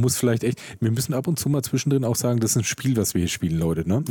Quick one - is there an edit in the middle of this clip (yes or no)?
no